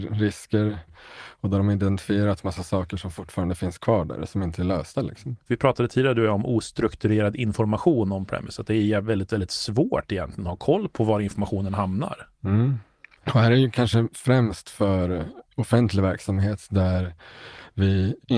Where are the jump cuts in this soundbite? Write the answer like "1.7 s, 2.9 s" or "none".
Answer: none